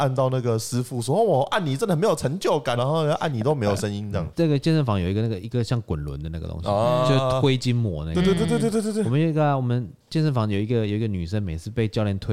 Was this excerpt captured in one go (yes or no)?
no